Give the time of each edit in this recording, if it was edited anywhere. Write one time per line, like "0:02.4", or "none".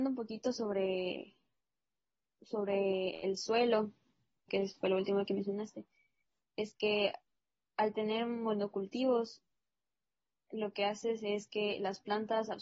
0:04.5